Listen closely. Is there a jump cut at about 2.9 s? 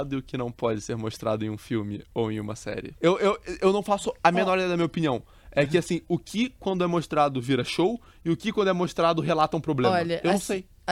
yes; 1 cut; at 2.9 s

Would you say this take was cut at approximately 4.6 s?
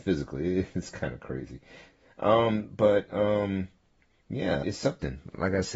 yes; 1 cut; at 4.6 s

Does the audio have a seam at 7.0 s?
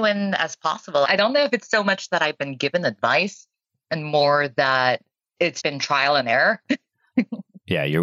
no; 2 cuts; at 1.1 s, 5.6 s

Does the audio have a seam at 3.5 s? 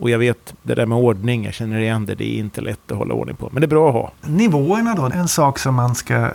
no; 1 cut; at 5.1 s

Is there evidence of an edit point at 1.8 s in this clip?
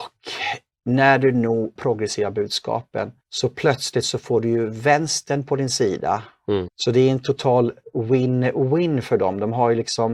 yes; 3 cuts; at 1.8 s, 3.2 s, 6.7 s

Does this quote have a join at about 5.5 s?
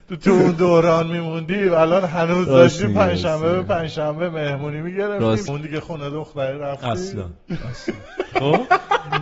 yes; 1 cut; at 5.5 s

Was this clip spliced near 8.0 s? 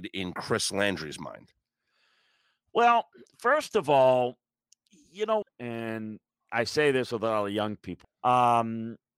yes; 2 cuts; at 5.4 s, 8.0 s

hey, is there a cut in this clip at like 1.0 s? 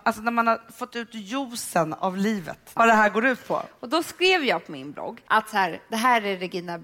no; 2 cuts; at 2.8 s, 5.3 s

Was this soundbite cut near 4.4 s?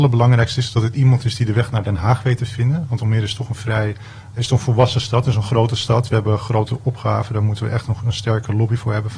yes; 1 cut; at 4.4 s

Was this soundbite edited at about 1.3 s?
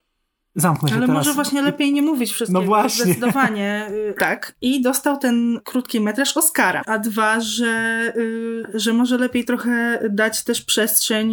no; 2 cuts; at 4.2 s, 6.8 s

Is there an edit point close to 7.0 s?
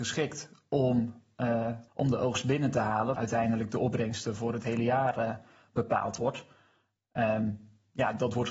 no; 2 cuts; at 1.9 s, 3.1 s

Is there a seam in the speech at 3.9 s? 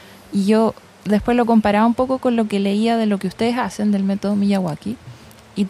no; 0 cuts

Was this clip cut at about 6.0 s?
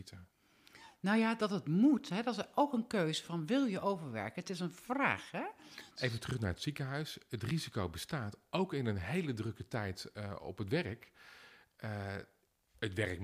yes; 1 cut; at 6.0 s

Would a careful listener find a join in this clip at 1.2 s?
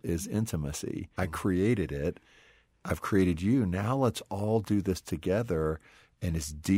yes; 1 cut; at 1.2 s

